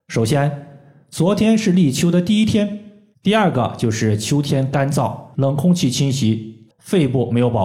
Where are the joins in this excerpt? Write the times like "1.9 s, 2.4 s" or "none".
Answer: 3.1 s, 5.3 s, 6.7 s